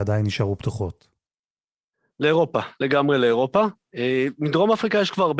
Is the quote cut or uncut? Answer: uncut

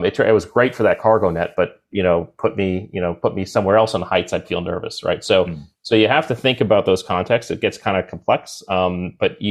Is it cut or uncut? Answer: cut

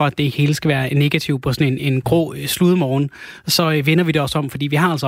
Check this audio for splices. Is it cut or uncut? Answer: uncut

